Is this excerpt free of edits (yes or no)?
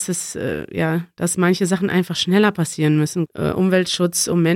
no